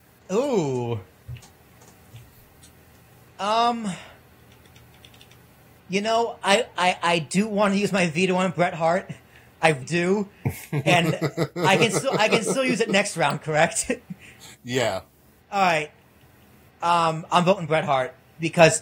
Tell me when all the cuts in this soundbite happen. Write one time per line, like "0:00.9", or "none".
0:09.8